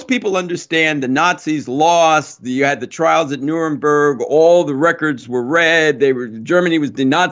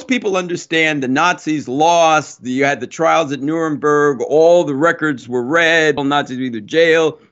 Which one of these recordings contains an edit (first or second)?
second